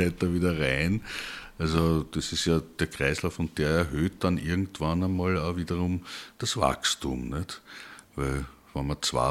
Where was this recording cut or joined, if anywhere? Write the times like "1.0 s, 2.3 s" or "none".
none